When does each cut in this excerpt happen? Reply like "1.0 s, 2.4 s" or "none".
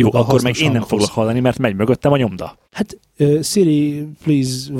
2.6 s